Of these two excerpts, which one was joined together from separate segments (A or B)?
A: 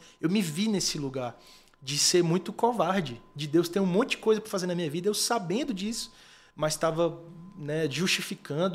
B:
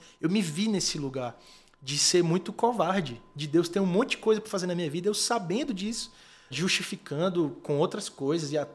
B